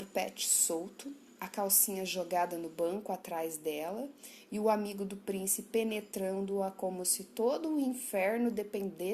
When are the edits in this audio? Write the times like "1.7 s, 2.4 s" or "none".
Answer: none